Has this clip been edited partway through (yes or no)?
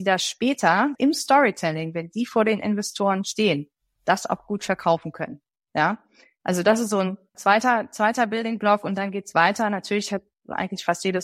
yes